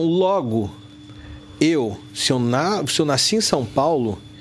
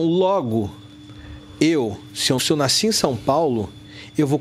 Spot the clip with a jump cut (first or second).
second